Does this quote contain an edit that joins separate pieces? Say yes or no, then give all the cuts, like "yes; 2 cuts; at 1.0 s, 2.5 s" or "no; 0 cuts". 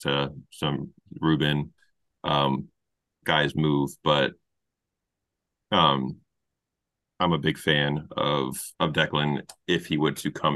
yes; 2 cuts; at 3.2 s, 8.7 s